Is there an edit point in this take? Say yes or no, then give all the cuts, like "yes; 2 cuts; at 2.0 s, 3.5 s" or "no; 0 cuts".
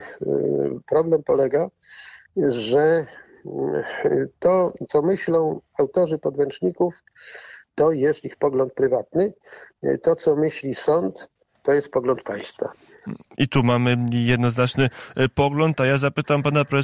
no; 0 cuts